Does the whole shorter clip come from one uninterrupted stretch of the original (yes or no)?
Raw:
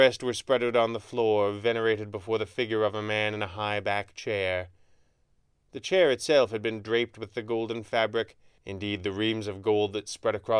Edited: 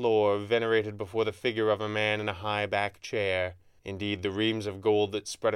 no